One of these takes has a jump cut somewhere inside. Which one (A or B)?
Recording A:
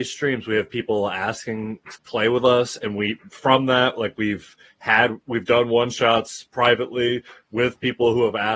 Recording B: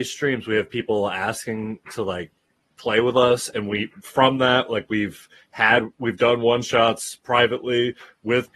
A